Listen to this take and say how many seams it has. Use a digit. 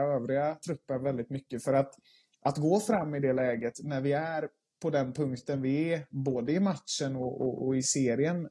0